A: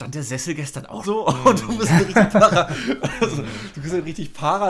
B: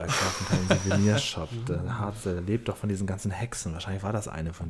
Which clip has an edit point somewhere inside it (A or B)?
A